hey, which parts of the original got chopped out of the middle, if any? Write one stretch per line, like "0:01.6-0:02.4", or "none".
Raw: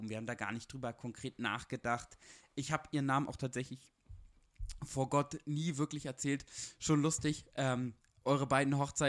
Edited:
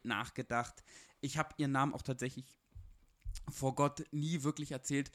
none

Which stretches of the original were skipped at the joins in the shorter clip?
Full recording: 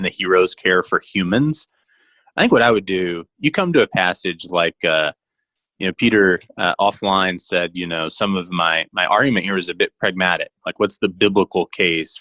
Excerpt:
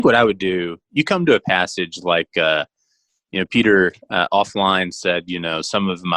none

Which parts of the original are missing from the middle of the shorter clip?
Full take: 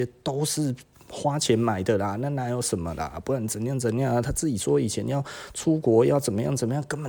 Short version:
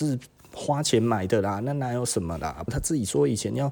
0:03.2-0:04.2

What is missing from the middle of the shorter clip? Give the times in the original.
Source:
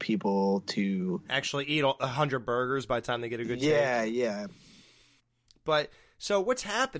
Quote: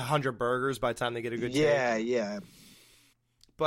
none

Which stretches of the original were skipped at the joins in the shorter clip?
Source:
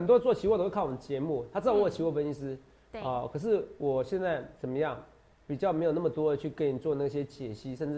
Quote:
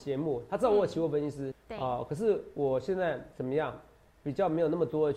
0:02.5-0:02.8

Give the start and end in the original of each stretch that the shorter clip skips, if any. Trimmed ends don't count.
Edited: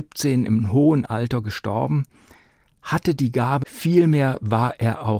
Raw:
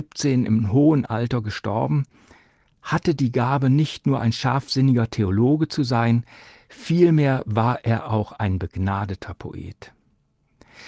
0:03.6-0:06.7

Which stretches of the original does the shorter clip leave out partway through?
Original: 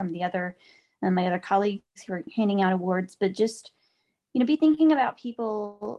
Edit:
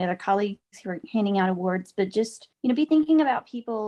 0:03.8-0:04.2

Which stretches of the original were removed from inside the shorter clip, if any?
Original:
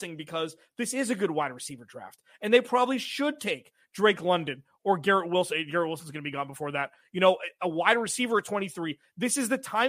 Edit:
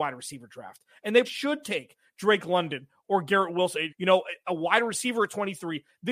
0:02.6-0:03.0
0:05.6-0:07.0

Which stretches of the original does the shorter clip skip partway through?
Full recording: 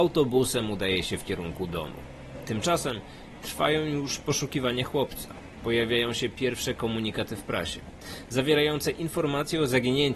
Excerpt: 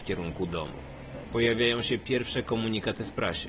0:02.4-0:05.6

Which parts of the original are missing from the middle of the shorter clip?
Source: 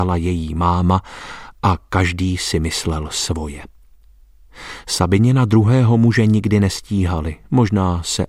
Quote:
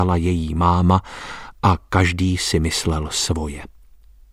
none

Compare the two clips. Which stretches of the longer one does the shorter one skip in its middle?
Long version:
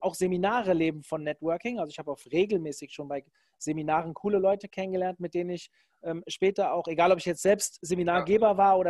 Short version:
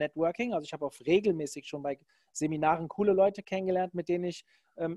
none

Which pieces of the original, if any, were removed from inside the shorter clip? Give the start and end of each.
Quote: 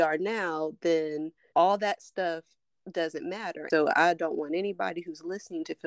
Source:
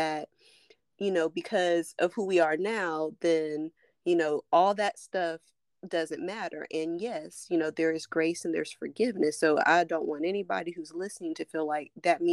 0:03.9-0:04.5
0:06.7-0:09.4

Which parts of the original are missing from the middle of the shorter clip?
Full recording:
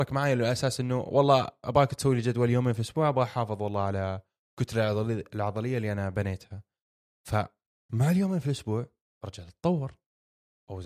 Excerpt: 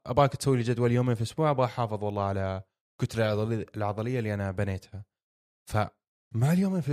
none

